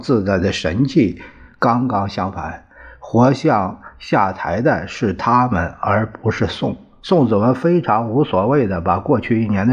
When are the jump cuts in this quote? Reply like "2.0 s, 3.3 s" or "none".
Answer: none